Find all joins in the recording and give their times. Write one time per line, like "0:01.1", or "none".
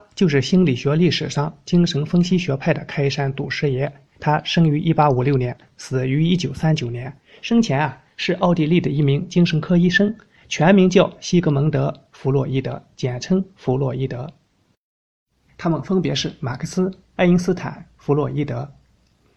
0:15.5